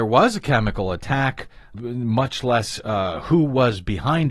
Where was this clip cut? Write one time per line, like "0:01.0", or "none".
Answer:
0:01.7